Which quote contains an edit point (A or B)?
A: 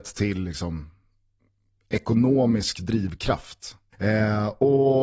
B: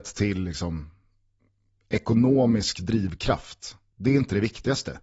A